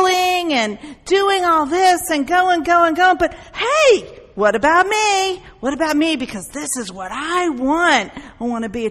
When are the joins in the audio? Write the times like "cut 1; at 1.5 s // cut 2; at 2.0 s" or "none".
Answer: none